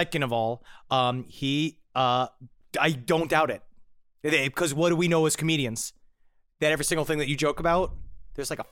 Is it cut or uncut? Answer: uncut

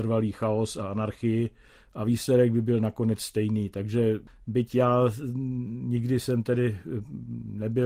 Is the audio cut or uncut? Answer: uncut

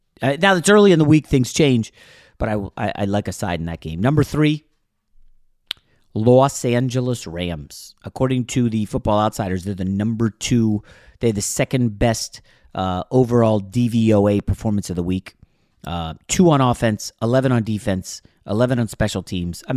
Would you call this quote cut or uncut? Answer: uncut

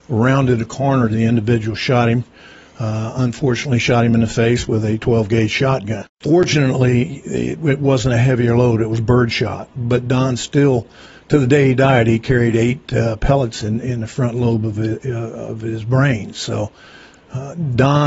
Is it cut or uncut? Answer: uncut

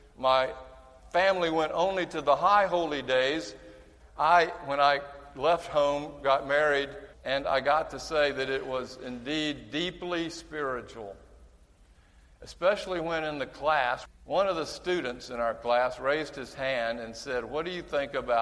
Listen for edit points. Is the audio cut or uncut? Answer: cut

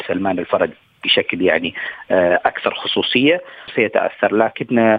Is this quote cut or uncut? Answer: cut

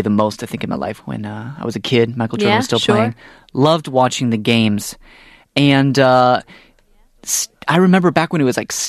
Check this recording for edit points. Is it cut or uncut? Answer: cut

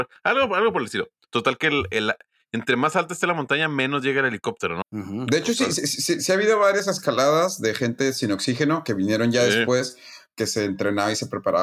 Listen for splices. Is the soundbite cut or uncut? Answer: cut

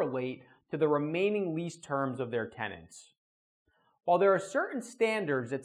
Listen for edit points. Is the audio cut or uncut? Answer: uncut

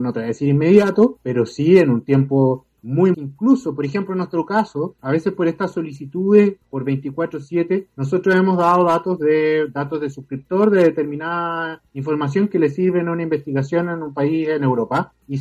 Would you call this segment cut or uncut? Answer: cut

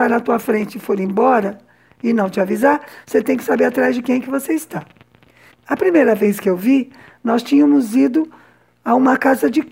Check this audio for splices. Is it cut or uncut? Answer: cut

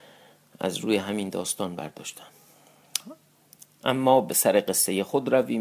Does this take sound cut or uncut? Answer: uncut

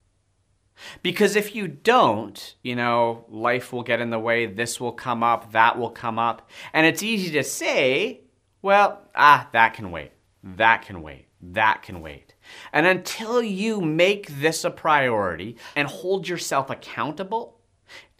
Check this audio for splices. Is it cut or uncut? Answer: cut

